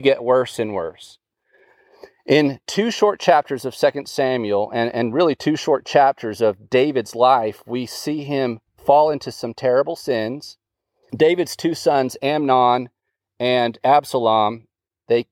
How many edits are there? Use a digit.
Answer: 1